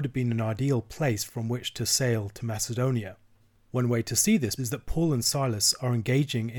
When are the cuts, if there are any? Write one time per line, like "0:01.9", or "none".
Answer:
0:04.6